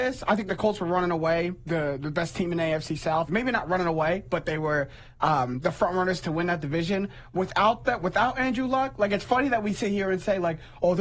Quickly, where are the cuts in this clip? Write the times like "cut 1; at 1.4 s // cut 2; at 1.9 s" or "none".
cut 1; at 3.3 s